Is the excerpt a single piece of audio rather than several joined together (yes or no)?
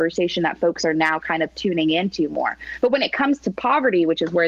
yes